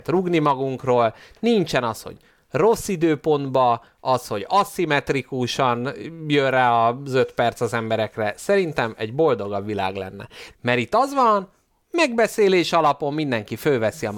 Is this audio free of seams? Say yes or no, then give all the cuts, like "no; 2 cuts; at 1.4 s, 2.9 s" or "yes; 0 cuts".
no; 1 cut; at 10.5 s